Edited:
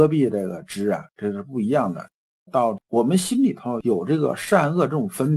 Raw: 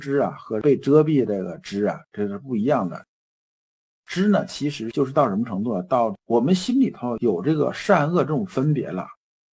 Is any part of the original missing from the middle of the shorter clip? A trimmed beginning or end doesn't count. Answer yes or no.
yes